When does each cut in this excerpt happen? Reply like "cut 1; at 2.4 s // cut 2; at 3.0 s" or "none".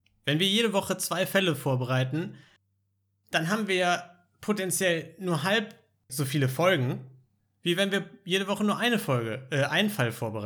none